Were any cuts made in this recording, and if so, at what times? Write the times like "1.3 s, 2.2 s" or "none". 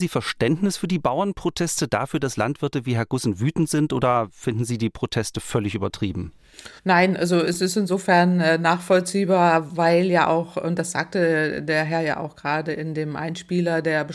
6.8 s